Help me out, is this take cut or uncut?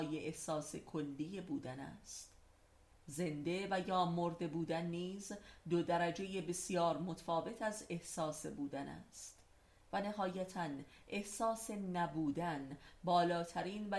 uncut